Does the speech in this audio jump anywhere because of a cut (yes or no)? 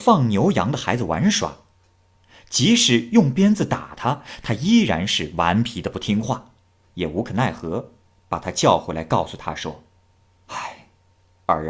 yes